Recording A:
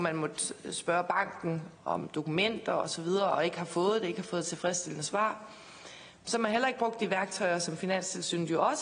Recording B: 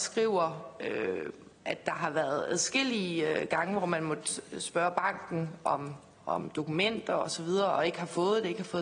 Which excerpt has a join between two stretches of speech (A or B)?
A